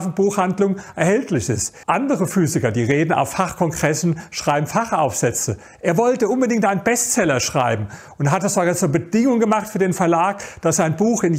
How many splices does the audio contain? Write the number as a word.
one